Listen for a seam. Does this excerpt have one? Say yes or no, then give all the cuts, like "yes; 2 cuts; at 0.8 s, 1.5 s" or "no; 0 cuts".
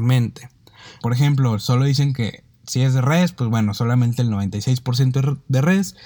yes; 1 cut; at 1.0 s